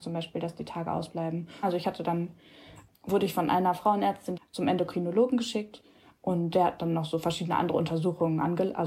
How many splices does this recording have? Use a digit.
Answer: 3